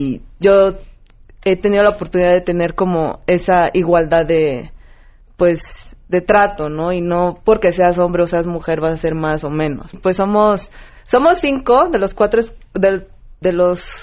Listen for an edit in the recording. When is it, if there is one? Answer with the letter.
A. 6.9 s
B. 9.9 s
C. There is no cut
B